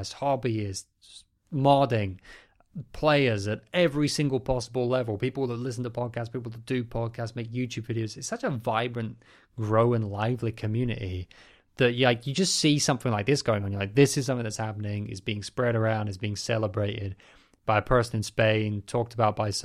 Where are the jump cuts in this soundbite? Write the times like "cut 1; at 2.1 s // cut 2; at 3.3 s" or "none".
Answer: none